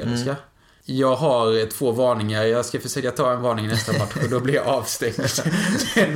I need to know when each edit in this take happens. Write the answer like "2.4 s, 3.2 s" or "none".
none